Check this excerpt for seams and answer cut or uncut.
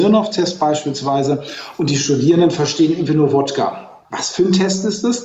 cut